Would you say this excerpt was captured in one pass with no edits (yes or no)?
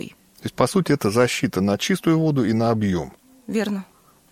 yes